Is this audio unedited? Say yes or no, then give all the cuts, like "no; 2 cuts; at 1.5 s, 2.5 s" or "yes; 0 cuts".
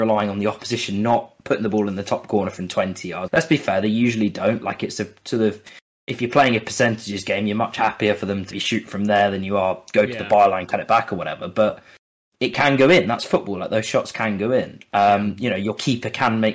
no; 2 cuts; at 3.3 s, 8.5 s